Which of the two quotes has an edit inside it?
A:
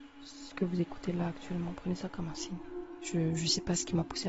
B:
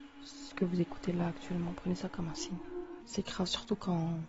B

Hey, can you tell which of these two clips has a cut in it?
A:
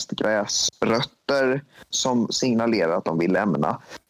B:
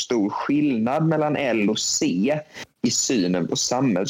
A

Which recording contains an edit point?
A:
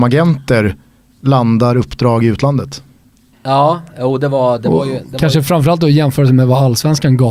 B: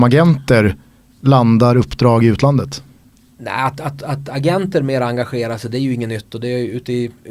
A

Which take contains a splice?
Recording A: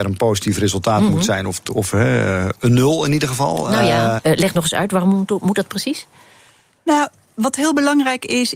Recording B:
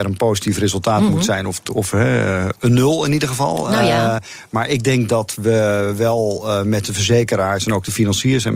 A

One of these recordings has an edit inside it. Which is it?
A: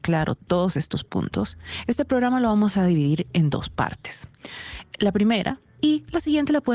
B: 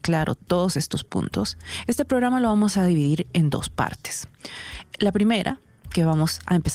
A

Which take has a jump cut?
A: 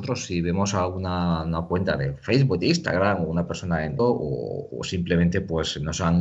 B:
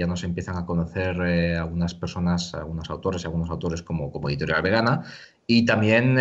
A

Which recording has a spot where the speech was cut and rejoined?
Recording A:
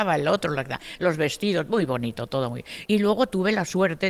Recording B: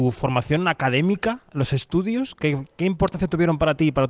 A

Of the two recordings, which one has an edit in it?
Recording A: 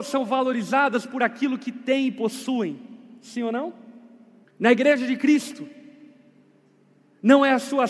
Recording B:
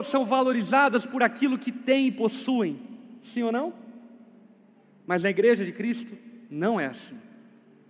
A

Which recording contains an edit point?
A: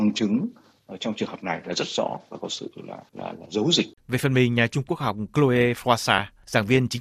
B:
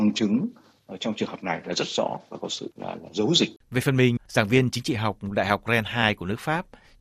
B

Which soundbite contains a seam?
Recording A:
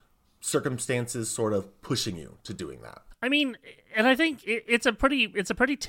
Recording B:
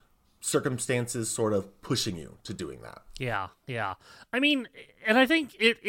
A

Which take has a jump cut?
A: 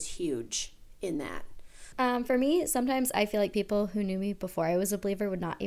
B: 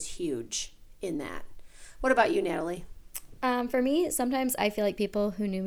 A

